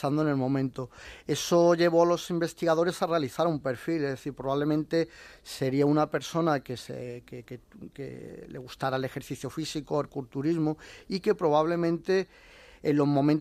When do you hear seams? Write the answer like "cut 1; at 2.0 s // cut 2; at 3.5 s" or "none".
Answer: none